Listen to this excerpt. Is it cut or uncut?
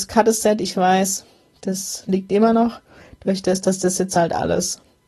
uncut